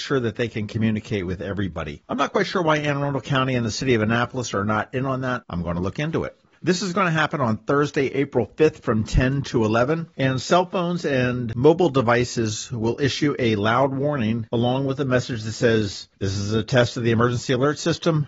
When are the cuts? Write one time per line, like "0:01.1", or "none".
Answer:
0:06.6

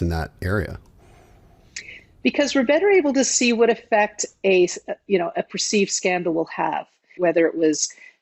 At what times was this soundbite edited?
0:07.2

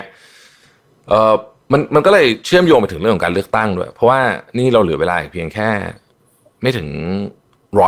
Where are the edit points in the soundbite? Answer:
none

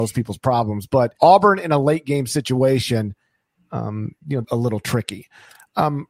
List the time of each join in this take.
0:01.2
0:04.4

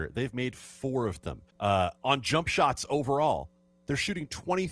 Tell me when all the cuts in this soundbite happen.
0:01.5

